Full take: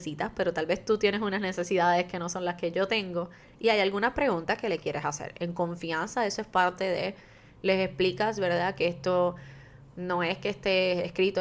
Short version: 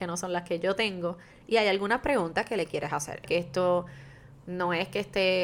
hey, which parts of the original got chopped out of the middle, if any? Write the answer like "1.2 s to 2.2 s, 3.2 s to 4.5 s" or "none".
5.4 s to 8.7 s